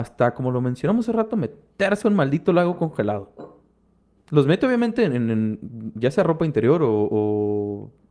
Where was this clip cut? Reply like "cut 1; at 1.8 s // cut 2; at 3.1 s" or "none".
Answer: cut 1; at 4.2 s